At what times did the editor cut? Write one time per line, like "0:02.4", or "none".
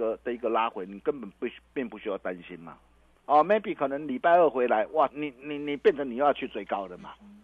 0:03.1
0:05.1